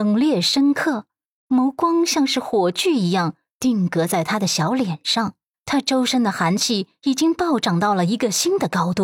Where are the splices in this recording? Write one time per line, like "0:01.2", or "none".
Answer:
0:05.5

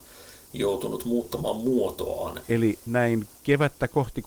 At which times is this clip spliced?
0:02.4

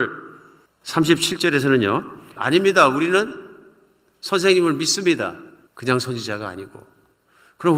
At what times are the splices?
0:02.4
0:05.7

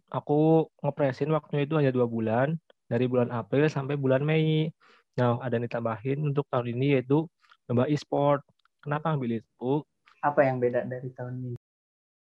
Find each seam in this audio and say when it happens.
0:05.4
0:10.1

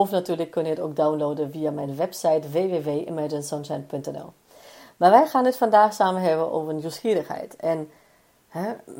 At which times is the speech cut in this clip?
none

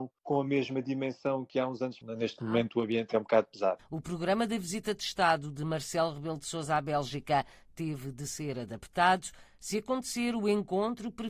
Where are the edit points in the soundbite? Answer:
0:03.8

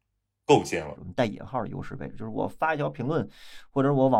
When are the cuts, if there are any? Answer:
0:01.0

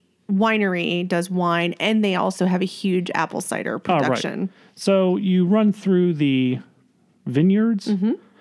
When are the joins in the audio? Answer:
none

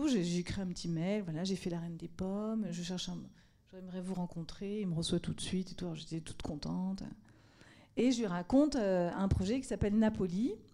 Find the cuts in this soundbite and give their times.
none

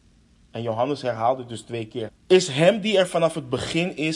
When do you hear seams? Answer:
0:02.1

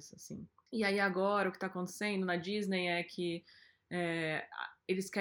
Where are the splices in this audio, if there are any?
none

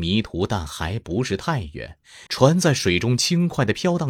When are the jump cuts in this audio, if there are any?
0:02.3

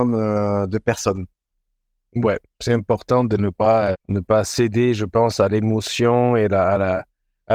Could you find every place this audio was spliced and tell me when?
0:03.9

